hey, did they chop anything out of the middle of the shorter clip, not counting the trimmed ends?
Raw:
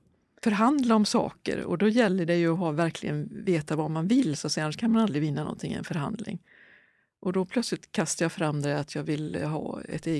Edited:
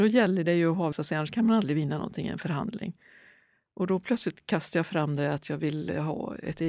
yes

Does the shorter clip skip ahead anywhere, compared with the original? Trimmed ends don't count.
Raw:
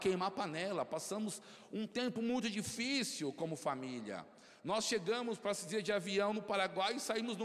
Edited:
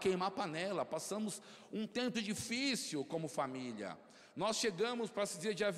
yes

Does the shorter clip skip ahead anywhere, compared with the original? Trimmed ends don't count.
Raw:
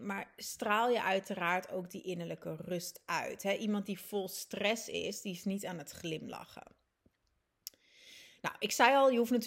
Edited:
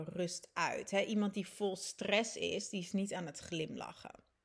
no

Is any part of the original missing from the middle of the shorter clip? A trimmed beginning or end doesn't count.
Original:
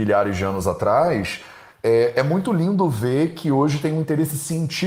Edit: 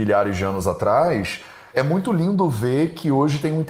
yes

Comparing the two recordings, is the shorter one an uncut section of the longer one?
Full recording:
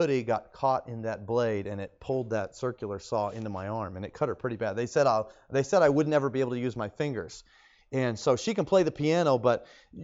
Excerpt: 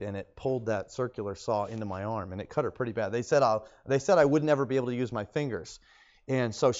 yes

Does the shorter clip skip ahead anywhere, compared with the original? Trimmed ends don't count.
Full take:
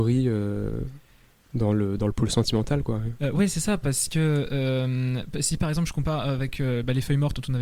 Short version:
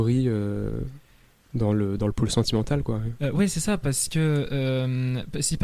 no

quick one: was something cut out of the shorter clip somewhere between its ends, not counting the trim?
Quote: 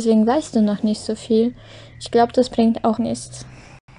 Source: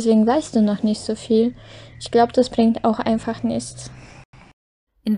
yes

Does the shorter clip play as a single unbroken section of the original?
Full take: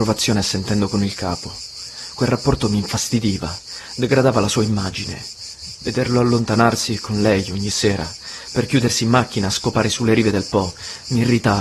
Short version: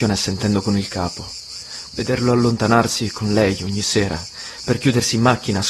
no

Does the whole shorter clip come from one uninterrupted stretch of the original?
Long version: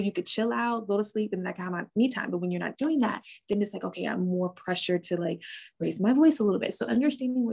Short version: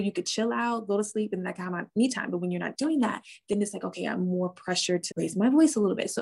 no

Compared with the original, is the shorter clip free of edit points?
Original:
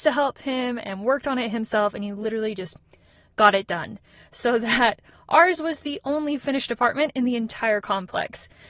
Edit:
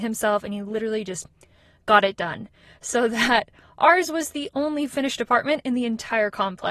yes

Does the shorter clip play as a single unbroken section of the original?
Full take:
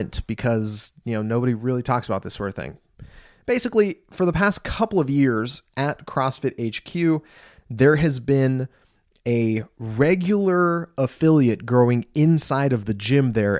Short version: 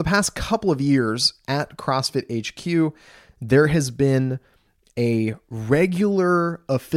yes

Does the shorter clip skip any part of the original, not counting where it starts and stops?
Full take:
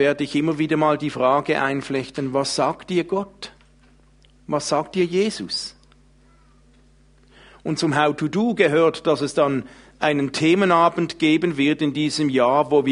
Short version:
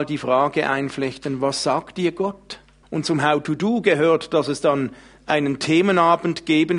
yes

